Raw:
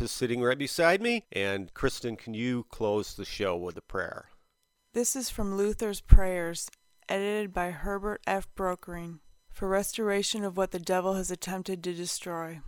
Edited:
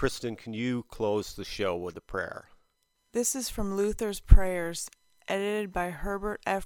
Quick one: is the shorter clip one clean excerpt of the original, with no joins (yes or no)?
yes